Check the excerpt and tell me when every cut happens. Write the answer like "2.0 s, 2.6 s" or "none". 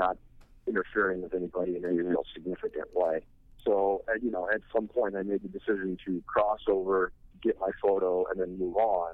3.6 s

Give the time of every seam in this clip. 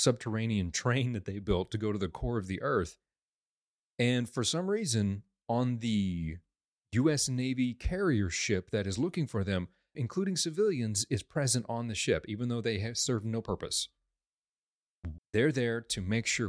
10.0 s, 15.2 s

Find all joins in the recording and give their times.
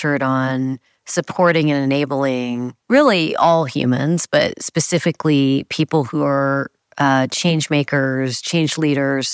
none

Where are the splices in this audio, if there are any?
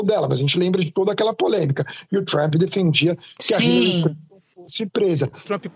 2.5 s

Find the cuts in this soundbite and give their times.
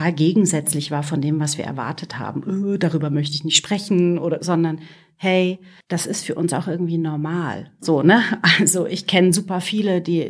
4.4 s

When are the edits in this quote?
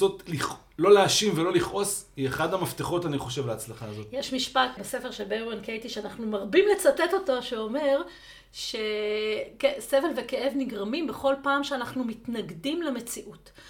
4.8 s

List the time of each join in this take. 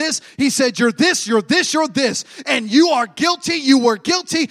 none

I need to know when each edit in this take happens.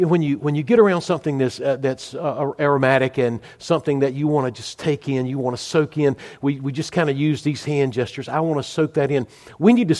none

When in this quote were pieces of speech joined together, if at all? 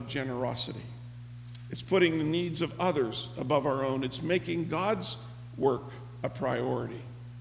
none

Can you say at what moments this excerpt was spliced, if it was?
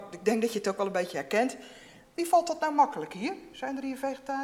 2.0 s

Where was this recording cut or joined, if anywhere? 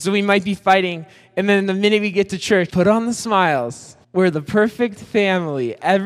2.7 s, 4.0 s

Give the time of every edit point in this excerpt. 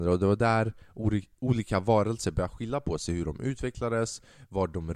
none

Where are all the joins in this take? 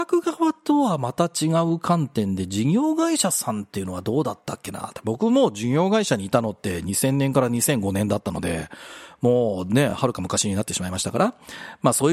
none

